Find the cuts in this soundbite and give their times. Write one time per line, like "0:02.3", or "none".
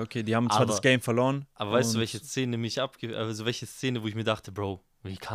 none